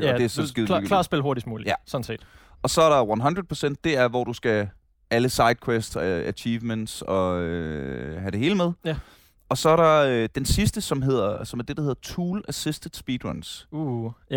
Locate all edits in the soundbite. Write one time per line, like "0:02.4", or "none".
none